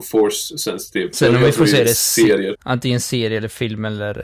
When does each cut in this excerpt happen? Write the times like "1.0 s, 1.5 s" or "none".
1.1 s, 2.5 s

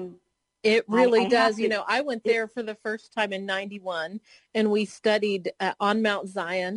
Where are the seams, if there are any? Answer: none

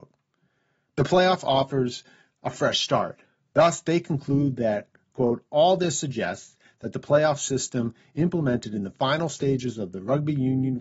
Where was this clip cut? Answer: 3.5 s

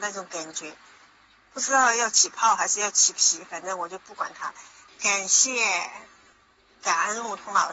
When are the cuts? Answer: 4.9 s

